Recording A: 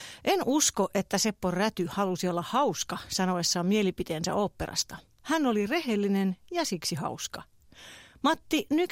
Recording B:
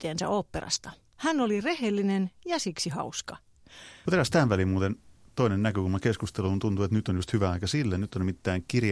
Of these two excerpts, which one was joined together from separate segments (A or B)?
B